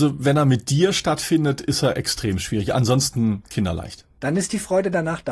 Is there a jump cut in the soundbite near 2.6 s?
no; 0 cuts

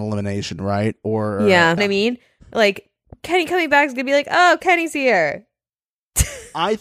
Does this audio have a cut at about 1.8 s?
yes; 1 cut; at 1.8 s

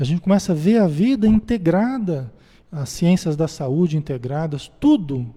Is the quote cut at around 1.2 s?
no; 1 cut; at 2.6 s

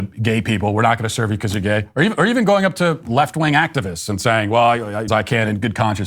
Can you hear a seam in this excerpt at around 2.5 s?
no; 1 cut; at 5.1 s

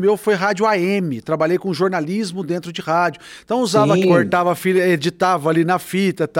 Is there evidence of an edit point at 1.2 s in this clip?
no; 1 cut; at 4.0 s

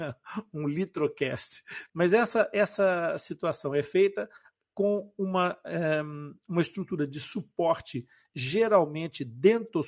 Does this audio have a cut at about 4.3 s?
no; 1 cut; at 1.9 s

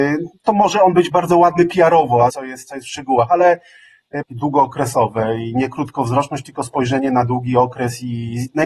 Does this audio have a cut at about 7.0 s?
no; 2 cuts; at 2.3 s, 4.3 s

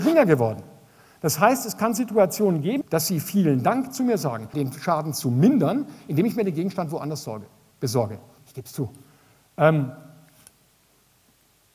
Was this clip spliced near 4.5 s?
yes; 3 cuts; at 2.8 s, 4.5 s, 8.4 s

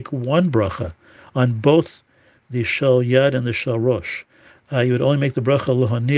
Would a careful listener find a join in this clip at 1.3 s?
no; 0 cuts

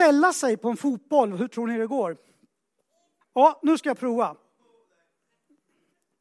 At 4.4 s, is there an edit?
no; 1 cut; at 3.2 s

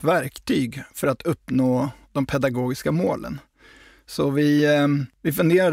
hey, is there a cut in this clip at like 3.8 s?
no; 0 cuts

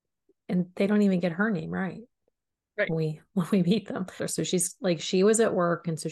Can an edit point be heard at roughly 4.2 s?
yes; 1 cut; at 4.2 s

